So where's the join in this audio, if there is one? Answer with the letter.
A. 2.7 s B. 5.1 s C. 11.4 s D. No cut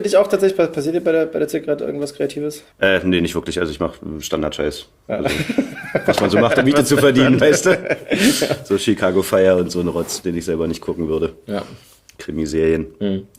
A